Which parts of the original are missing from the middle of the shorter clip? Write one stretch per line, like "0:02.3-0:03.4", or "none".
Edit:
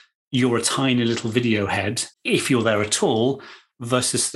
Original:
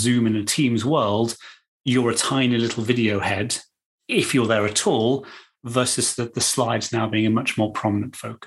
0:03.7-0:04.0